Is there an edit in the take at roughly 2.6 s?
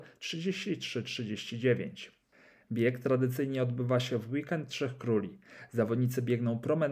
yes; 1 cut; at 2.6 s

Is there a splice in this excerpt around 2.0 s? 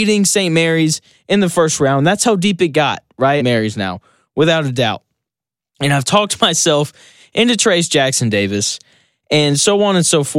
no; 1 cut; at 3.4 s

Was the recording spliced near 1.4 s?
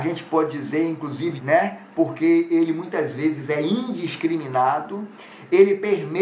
yes; 1 cut; at 1.4 s

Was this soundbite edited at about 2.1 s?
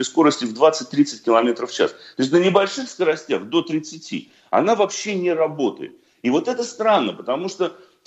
no; 0 cuts

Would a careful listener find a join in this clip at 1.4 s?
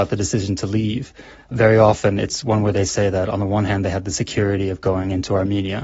no; 0 cuts

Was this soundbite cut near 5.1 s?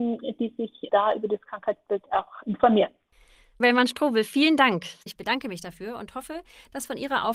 yes; 2 cuts; at 3.6 s, 5.1 s

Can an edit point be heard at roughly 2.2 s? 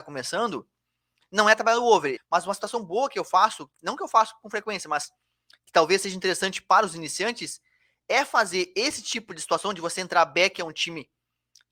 yes; 1 cut; at 2.2 s

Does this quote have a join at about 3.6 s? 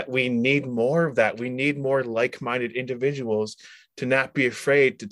no; 0 cuts

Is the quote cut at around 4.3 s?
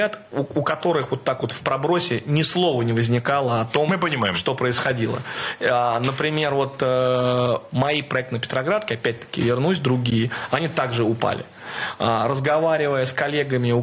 no; 0 cuts

